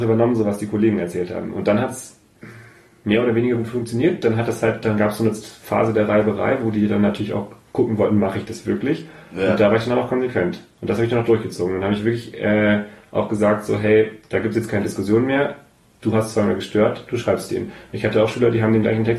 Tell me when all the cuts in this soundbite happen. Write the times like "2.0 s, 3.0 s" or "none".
none